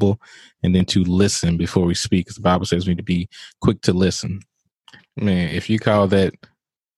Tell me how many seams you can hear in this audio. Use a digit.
1